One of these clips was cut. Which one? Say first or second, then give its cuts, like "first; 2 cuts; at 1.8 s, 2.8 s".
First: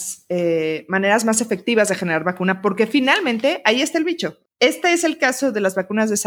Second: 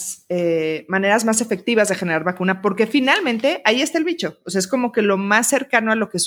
first; 1 cut; at 4.4 s